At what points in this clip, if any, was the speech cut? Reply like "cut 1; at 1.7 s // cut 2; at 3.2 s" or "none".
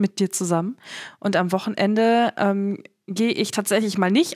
none